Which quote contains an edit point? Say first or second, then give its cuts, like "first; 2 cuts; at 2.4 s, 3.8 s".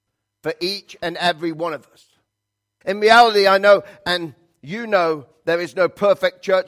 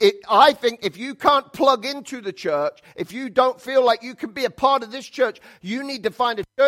first; 1 cut; at 2.8 s